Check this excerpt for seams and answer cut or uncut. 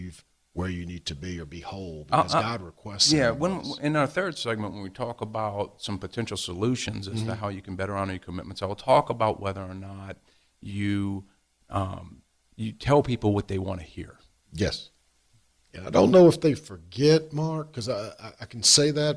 cut